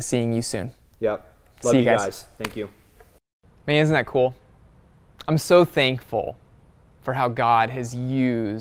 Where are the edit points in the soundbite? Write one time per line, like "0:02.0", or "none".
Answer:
none